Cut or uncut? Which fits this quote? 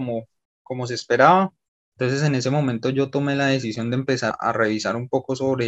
cut